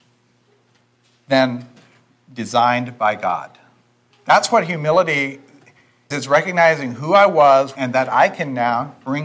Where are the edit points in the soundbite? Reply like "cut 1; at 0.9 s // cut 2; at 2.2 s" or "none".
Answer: cut 1; at 4.1 s // cut 2; at 6.1 s // cut 3; at 7.8 s